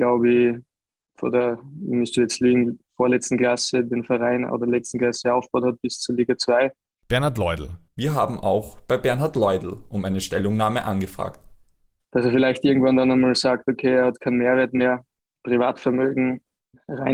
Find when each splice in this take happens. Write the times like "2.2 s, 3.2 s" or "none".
7.9 s, 12.0 s